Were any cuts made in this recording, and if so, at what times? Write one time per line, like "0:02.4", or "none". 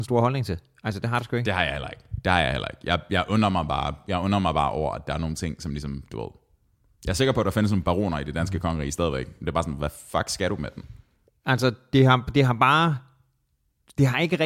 0:11.3